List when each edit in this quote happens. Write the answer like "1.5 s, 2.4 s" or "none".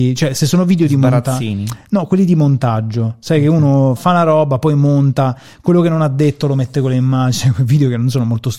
4.0 s